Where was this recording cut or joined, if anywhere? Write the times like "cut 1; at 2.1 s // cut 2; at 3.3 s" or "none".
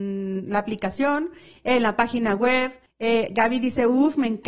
cut 1; at 2.9 s